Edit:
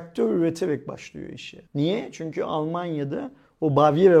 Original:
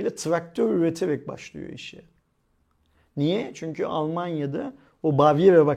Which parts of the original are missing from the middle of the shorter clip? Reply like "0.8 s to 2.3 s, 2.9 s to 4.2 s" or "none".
2.1 s to 3.1 s

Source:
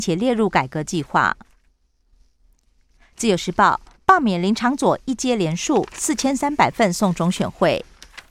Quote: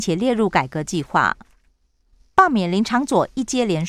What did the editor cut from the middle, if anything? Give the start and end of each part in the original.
2.3 s to 4.0 s

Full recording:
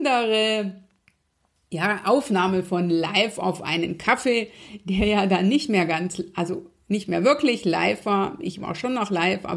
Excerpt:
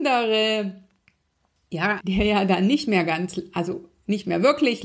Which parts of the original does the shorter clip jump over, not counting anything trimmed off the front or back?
2.0 s to 4.8 s

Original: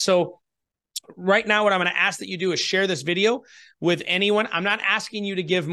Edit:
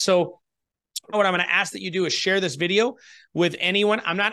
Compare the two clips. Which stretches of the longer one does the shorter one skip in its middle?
1.1 s to 1.6 s

